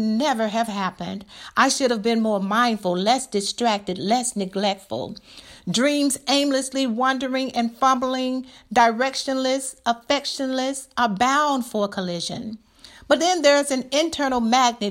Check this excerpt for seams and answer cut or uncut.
uncut